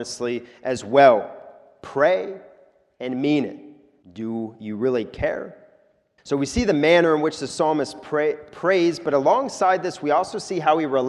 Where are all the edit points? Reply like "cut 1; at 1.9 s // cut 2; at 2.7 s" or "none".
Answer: cut 1; at 4.0 s // cut 2; at 6.2 s